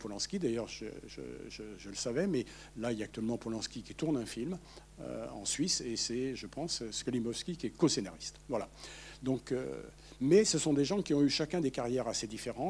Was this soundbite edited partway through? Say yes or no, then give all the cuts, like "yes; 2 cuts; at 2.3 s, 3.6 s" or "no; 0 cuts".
no; 0 cuts